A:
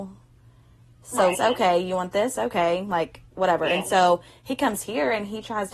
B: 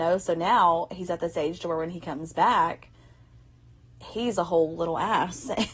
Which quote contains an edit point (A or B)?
A